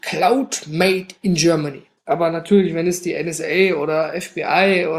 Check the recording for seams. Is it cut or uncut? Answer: cut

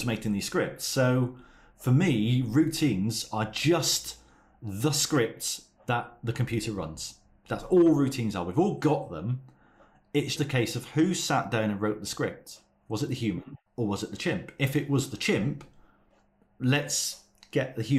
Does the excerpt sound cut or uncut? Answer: cut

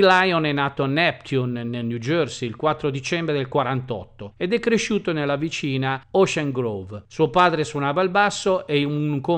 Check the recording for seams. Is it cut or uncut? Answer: cut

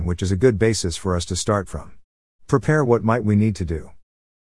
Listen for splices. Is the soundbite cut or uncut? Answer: cut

